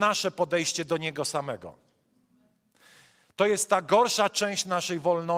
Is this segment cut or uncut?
uncut